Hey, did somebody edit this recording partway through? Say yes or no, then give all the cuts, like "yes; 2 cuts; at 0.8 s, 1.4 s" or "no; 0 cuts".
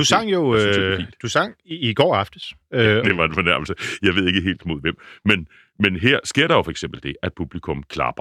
yes; 1 cut; at 3.0 s